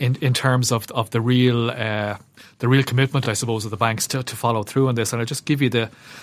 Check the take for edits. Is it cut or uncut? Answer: uncut